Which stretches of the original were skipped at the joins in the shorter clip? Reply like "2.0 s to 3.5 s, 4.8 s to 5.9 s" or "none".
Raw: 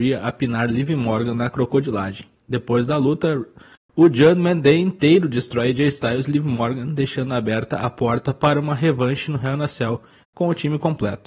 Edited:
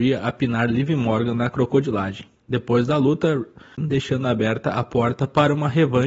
3.8 s to 6.8 s